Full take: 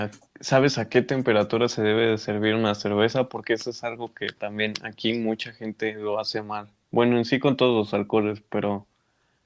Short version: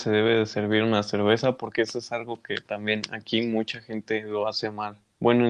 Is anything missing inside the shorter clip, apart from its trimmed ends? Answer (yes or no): no